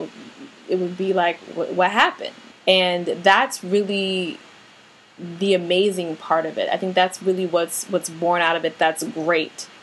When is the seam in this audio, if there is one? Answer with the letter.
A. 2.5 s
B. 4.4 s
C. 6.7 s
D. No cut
A